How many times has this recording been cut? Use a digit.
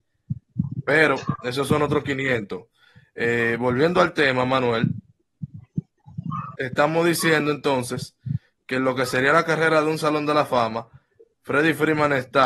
0